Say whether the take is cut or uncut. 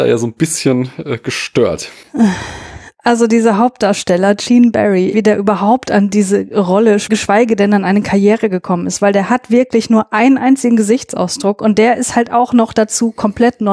cut